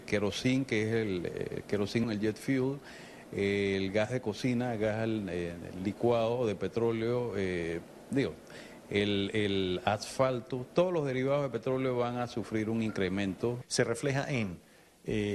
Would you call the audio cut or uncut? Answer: cut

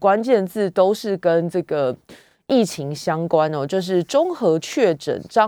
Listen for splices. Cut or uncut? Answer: uncut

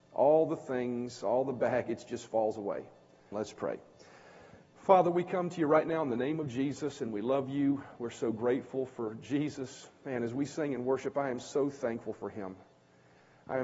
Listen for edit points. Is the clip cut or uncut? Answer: cut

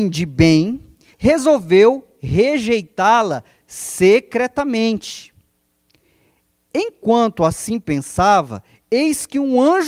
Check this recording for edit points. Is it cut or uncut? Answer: cut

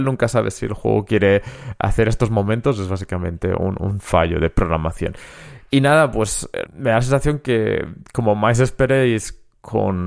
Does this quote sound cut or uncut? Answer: cut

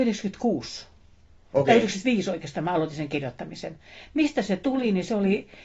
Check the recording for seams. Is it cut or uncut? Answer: uncut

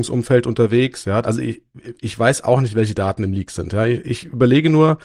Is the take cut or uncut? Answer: cut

